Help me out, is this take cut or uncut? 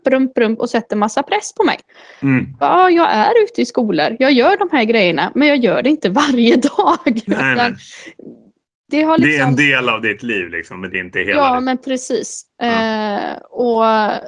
uncut